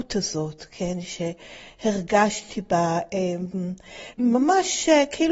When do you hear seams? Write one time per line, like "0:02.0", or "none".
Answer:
0:04.1